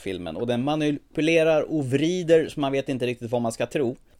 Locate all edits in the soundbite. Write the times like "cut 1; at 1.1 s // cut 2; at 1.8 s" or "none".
none